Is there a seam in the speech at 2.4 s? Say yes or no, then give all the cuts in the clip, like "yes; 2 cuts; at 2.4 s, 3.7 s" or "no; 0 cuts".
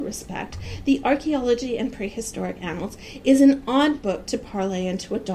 no; 0 cuts